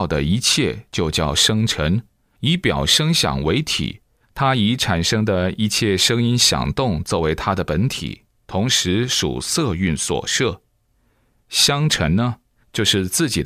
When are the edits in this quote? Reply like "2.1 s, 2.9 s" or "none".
none